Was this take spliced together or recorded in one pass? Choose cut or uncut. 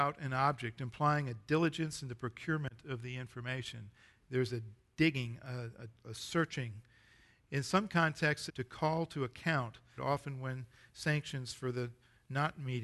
cut